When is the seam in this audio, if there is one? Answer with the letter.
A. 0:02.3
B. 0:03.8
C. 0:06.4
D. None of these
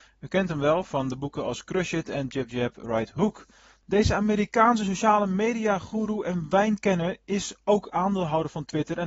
A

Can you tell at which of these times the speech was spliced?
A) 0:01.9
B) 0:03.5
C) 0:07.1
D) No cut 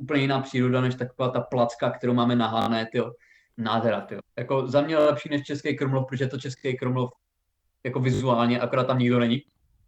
B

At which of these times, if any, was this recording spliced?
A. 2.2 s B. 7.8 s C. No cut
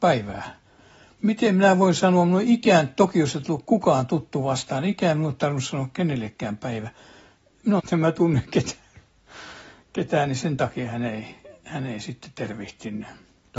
B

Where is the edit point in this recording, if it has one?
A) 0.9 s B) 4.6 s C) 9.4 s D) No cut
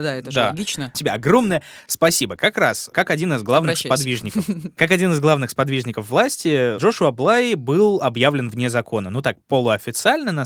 A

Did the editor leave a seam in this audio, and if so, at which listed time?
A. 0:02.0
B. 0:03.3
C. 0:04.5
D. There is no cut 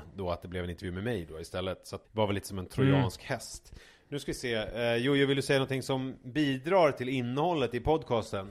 A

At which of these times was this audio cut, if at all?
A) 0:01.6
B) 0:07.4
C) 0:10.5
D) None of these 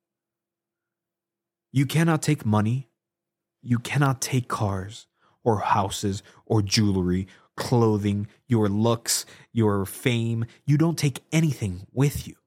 D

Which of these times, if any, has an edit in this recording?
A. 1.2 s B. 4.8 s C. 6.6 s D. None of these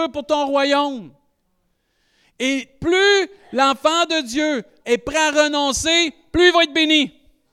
B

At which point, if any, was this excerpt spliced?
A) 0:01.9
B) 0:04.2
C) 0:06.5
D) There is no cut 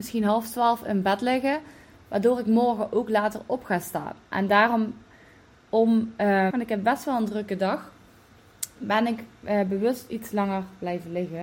C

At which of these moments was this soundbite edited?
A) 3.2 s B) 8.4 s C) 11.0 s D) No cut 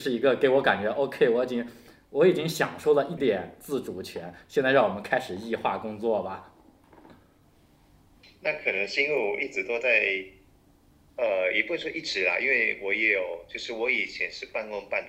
A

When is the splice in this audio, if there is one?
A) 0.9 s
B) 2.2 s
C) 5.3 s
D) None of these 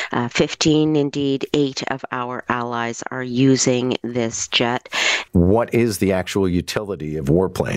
C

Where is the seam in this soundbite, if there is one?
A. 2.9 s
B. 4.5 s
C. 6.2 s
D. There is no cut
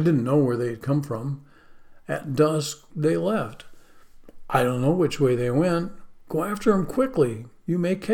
A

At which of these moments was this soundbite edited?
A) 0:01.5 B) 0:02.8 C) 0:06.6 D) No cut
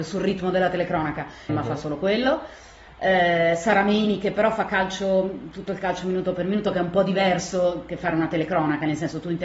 A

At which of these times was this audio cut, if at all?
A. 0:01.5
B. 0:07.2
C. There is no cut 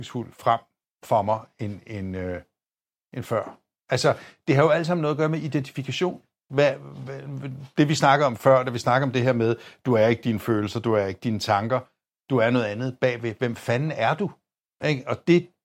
C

